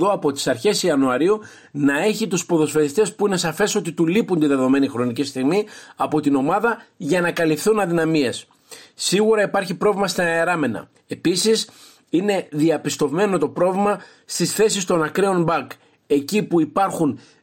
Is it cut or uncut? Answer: cut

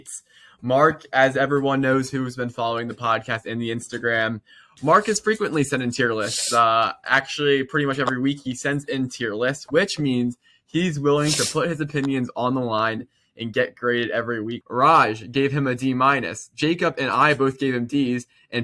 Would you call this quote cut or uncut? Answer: cut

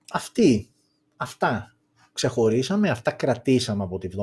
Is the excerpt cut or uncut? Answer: uncut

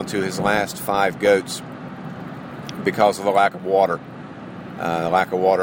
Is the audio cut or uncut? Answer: uncut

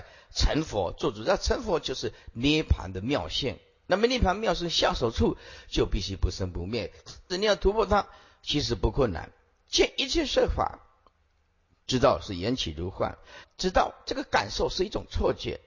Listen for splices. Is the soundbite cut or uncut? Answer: cut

